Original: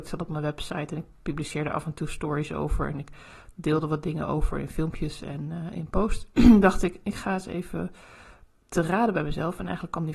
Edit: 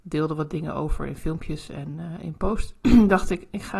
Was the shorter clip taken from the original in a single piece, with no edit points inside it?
yes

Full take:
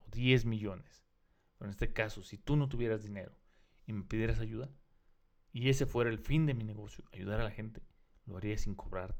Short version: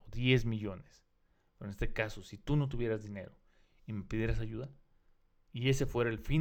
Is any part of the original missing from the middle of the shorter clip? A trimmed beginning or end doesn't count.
no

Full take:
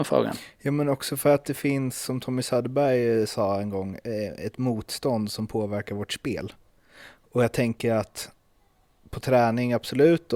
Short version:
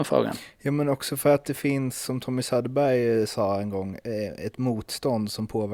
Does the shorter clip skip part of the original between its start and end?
no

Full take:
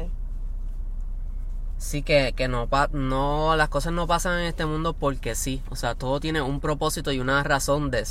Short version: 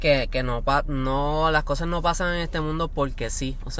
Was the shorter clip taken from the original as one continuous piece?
yes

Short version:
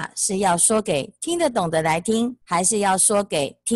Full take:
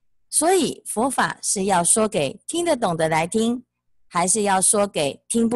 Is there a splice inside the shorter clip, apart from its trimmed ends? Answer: yes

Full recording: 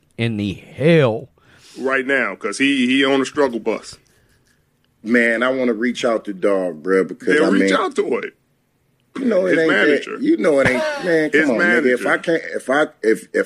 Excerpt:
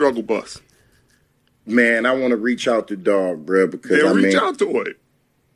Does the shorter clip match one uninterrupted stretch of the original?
yes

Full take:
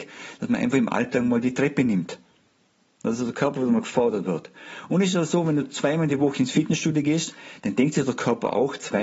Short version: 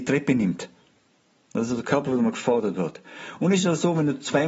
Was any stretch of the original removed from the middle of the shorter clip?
no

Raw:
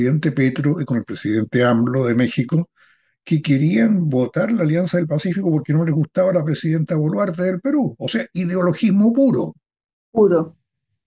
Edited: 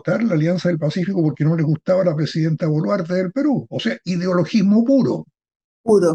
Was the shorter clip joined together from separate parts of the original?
no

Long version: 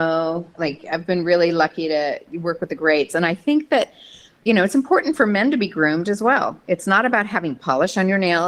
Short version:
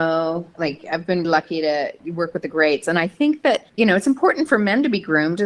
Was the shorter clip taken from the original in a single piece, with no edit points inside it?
no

